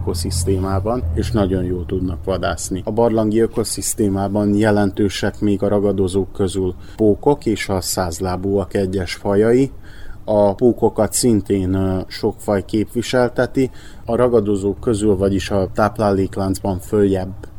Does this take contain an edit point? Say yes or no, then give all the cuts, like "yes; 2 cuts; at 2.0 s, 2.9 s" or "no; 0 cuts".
yes; 2 cuts; at 2.8 s, 14.0 s